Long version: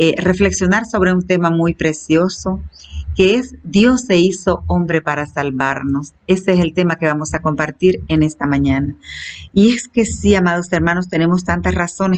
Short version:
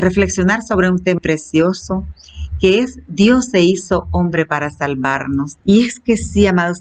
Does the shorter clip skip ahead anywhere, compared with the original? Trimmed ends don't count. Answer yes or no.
yes